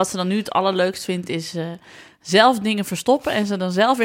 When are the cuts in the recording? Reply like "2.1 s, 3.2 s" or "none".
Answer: none